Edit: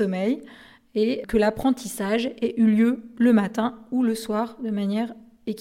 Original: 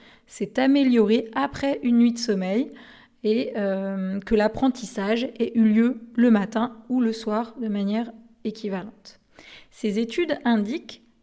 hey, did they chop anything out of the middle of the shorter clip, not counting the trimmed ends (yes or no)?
yes